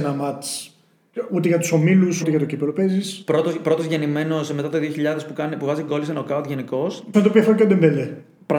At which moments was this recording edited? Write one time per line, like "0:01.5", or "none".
0:02.2
0:07.1